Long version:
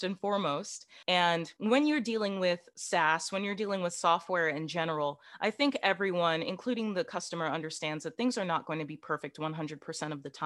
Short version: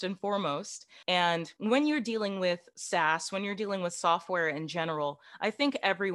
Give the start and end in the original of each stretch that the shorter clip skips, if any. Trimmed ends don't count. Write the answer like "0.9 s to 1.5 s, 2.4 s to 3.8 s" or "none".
none